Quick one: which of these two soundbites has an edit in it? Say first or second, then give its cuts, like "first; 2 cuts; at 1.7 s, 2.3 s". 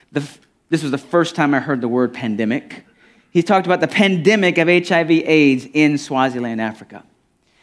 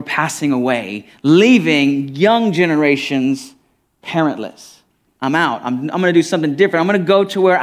second; 1 cut; at 5.1 s